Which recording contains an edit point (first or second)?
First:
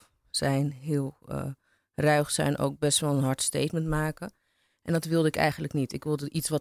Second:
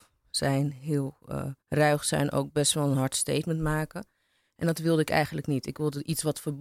second